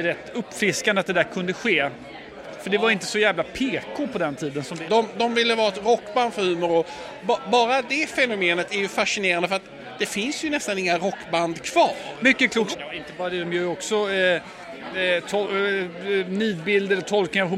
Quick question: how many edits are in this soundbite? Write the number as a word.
two